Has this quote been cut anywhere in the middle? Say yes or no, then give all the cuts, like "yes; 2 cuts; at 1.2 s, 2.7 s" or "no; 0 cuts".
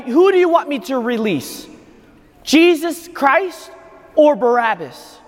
no; 0 cuts